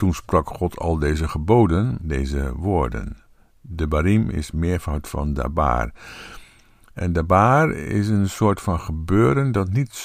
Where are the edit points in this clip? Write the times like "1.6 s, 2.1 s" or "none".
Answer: 2.0 s